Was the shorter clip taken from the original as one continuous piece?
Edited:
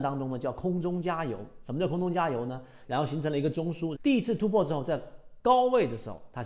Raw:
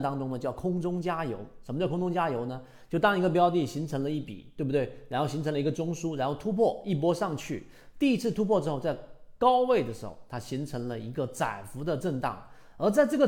no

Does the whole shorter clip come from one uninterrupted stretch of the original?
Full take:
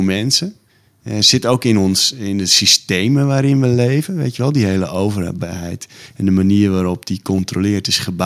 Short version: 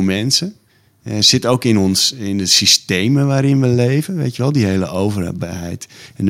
yes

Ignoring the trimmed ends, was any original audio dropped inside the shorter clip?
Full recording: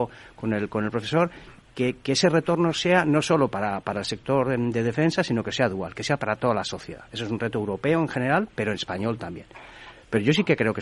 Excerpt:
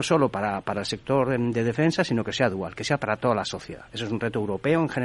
no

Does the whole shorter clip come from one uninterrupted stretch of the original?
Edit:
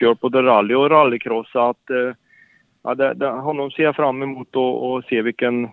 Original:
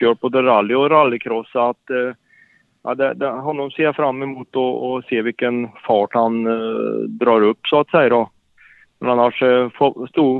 yes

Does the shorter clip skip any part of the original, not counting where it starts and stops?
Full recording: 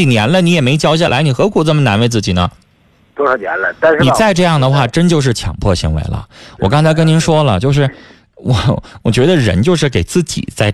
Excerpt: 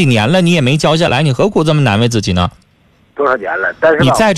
no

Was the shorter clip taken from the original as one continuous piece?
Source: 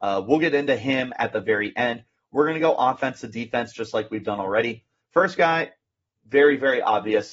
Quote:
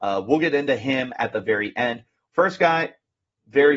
no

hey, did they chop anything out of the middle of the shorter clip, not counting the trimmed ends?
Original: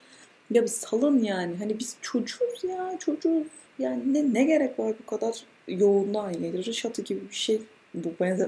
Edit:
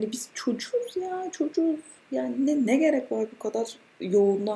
no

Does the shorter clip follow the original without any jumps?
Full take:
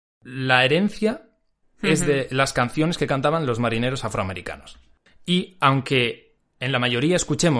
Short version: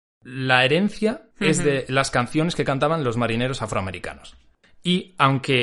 no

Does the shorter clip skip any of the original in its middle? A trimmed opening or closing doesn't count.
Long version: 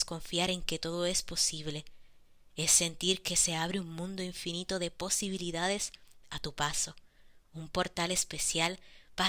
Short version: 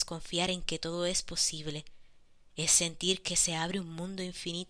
no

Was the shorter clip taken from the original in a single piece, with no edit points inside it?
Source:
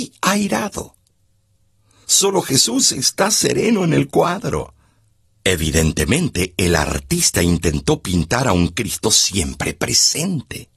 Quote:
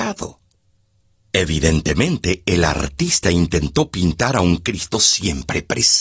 no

